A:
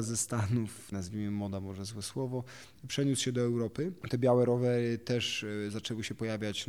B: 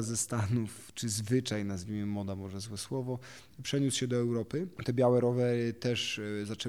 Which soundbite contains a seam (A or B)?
A